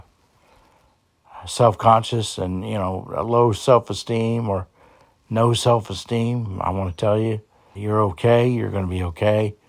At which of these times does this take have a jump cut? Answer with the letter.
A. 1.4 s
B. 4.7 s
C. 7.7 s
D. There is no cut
C